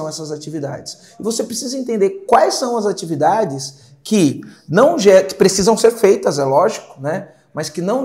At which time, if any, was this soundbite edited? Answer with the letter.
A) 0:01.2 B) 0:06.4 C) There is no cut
C